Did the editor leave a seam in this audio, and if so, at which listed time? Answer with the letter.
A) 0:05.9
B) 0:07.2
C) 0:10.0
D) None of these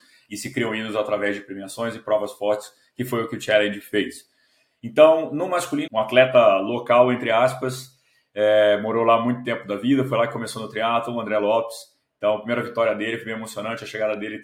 A